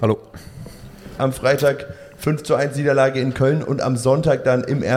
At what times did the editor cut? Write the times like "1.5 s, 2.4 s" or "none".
1.2 s

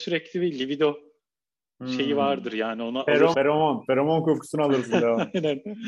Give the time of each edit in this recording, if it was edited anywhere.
3.3 s

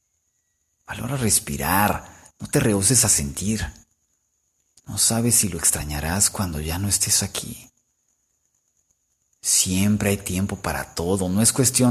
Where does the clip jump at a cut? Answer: none

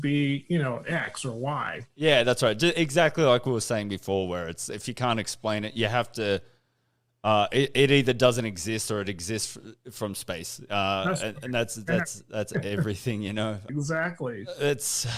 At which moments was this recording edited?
13.7 s

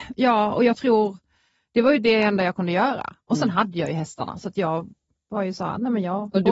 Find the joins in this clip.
none

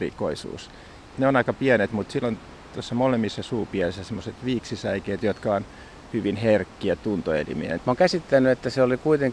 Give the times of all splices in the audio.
1.1 s, 7.8 s

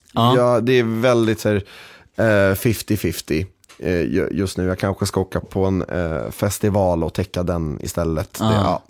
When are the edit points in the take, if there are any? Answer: 5.4 s

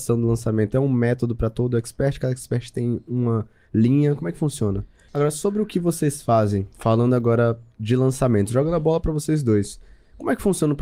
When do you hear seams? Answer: 5.1 s

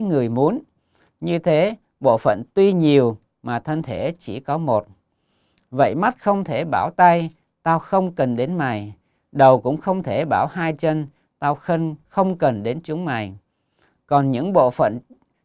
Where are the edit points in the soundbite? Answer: 1.1 s

